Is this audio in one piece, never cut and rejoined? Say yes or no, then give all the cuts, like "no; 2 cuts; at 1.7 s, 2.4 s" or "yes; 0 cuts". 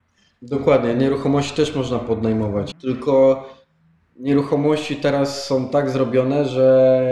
no; 1 cut; at 2.7 s